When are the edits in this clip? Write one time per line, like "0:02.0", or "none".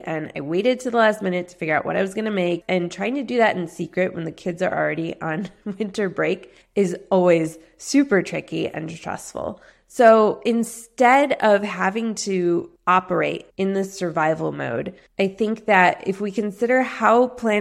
0:02.6
0:12.8